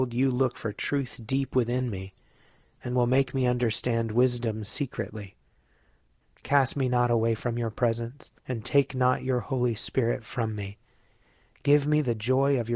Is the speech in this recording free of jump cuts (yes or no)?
no